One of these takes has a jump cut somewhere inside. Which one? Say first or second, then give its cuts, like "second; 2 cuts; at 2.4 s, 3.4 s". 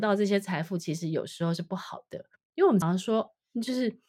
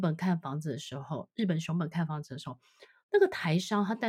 first; 1 cut; at 2.8 s